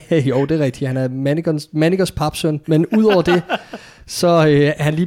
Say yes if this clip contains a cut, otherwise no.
yes